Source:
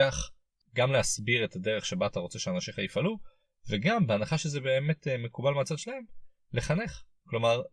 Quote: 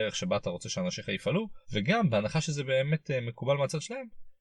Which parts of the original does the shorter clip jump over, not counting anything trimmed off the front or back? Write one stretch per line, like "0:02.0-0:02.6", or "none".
0:03.3-0:03.6